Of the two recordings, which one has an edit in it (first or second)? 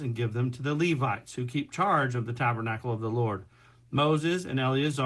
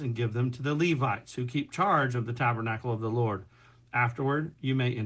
second